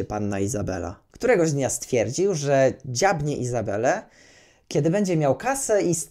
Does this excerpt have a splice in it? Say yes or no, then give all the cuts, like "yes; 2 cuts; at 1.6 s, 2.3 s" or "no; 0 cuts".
yes; 1 cut; at 1.1 s